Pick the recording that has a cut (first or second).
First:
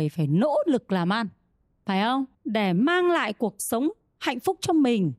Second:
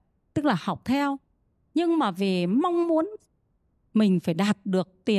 first